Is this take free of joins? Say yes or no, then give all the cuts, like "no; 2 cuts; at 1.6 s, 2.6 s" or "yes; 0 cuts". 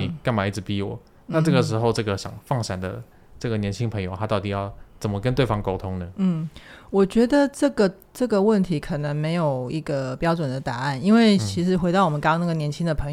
yes; 0 cuts